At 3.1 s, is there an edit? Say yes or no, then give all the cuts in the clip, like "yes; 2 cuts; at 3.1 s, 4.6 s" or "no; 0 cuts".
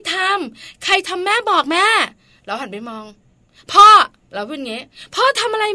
no; 0 cuts